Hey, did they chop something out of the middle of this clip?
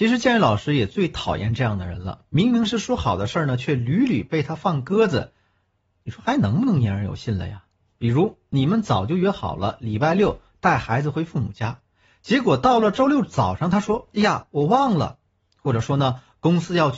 no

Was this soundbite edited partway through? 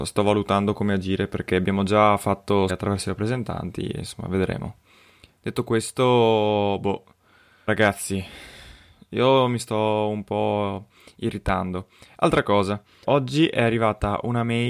yes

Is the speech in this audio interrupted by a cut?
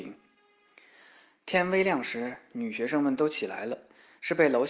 no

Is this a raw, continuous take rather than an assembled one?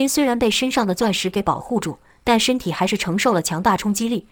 yes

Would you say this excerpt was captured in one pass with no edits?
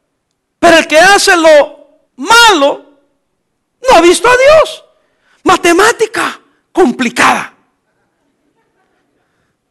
no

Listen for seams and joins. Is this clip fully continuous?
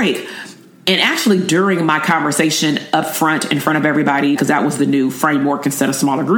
no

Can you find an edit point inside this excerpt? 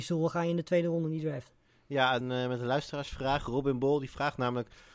yes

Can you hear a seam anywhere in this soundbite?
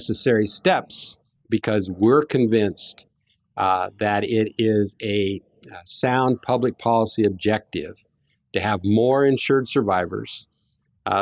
yes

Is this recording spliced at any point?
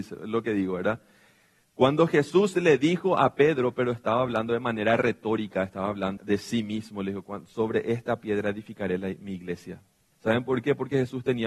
yes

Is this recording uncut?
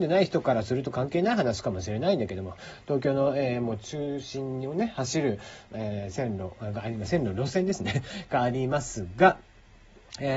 no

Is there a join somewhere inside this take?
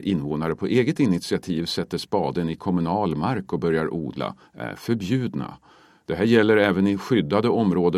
no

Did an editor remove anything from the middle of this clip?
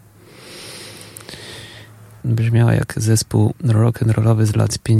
yes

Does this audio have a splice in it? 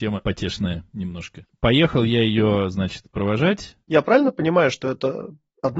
yes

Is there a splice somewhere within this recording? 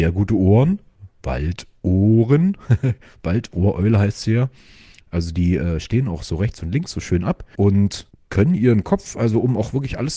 yes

